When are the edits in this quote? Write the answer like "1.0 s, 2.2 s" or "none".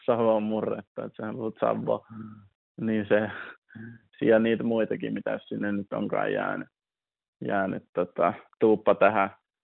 none